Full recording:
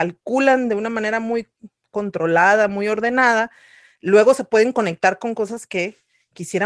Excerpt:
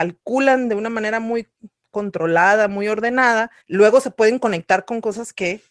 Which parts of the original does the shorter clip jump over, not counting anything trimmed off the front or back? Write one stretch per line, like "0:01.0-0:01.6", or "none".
0:03.6-0:03.9